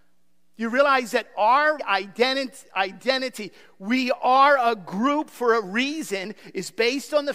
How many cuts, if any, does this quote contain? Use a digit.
1